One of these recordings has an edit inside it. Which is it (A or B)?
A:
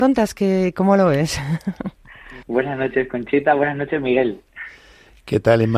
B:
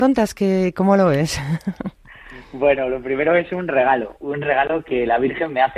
A